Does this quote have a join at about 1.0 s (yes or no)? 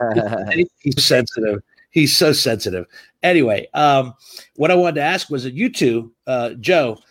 yes